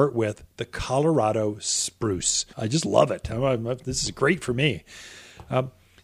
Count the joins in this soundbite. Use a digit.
1